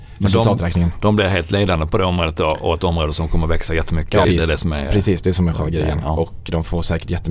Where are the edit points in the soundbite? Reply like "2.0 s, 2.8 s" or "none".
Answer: 4.2 s